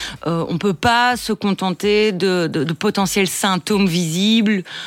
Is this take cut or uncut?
uncut